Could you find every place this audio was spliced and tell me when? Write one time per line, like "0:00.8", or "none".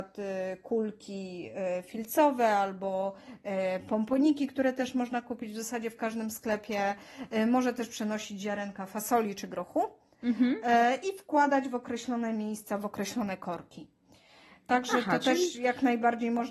none